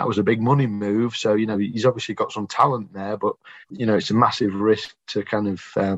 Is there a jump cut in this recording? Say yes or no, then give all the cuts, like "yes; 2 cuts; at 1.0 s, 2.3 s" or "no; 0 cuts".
no; 0 cuts